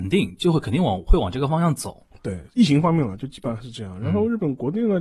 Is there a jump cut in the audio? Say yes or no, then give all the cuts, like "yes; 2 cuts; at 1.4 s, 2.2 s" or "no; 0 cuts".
no; 0 cuts